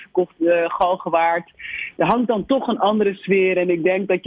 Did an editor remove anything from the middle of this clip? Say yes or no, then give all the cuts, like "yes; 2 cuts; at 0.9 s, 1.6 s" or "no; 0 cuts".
no; 0 cuts